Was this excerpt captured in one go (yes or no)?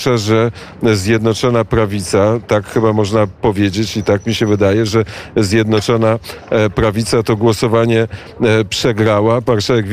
yes